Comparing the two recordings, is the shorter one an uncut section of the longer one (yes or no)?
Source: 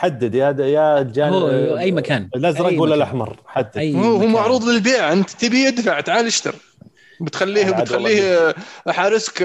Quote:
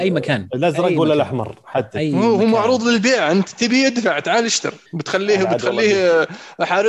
no